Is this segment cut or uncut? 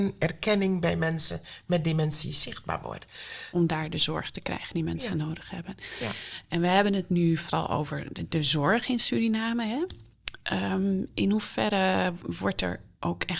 cut